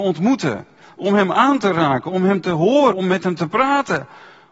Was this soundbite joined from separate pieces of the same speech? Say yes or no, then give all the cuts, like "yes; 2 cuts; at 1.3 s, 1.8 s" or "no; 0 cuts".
yes; 1 cut; at 2.9 s